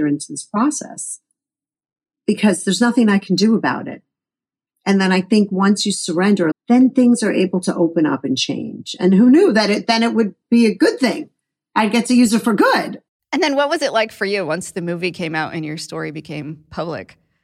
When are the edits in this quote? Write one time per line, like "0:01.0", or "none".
0:06.5
0:13.2